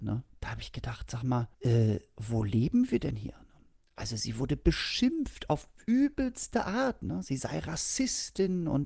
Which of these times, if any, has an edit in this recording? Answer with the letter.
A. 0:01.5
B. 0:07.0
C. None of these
A